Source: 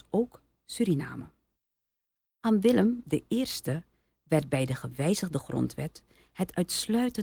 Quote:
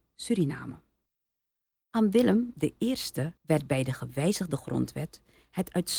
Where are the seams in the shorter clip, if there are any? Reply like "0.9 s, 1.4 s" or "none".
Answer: 3.4 s